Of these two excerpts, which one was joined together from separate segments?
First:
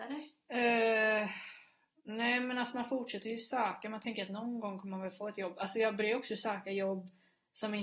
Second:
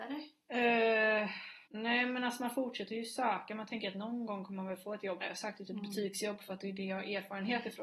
second; 2 cuts; at 1.7 s, 5.2 s

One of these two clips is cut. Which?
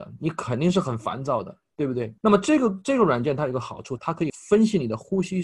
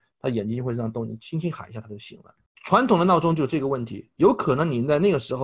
first; 2 cuts; at 2.2 s, 4.0 s

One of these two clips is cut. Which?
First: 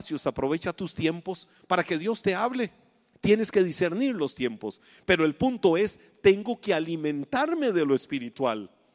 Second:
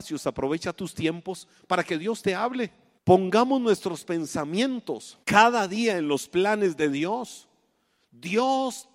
second; 2 cuts; at 3.0 s, 5.2 s

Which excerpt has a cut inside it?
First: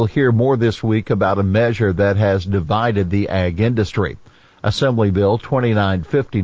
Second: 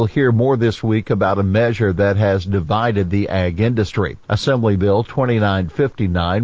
second; 1 cut; at 4.2 s

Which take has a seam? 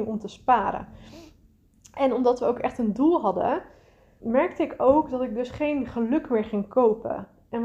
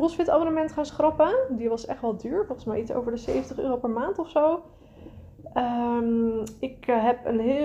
first; 1 cut; at 4.2 s

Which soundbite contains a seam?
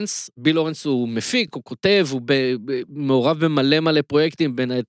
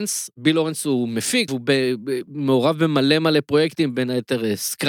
second; 1 cut; at 1.5 s

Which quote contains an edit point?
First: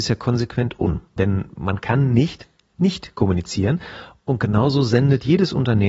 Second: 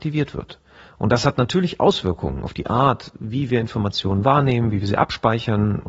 first; 1 cut; at 1.2 s

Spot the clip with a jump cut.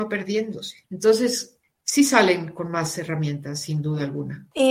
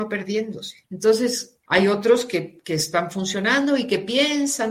second; 1 cut; at 1.7 s

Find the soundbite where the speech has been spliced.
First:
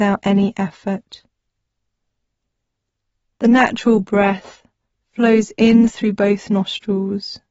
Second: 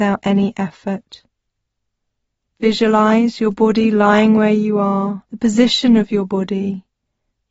second; 2 cuts; at 2.5 s, 5.3 s

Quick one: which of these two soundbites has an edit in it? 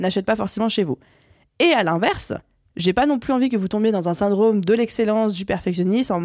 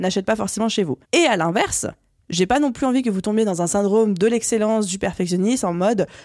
second; 1 cut; at 1.0 s

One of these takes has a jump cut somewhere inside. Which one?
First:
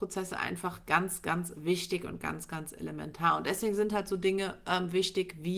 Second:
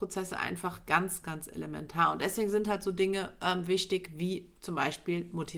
second; 1 cut; at 1.2 s

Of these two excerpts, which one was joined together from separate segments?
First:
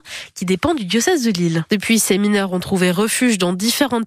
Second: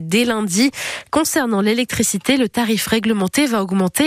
first; 1 cut; at 1.7 s

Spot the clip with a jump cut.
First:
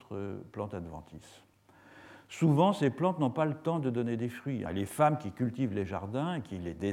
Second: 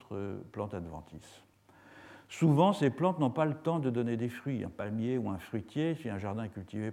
first; 1 cut; at 4.7 s

